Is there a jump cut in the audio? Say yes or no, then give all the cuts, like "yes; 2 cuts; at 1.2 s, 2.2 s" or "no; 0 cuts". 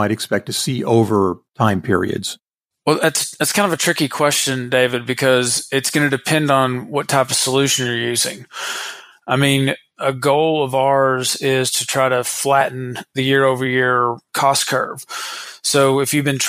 no; 0 cuts